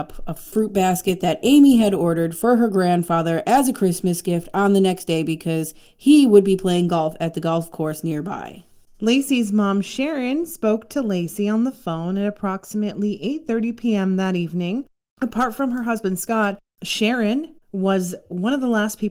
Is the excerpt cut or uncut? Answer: uncut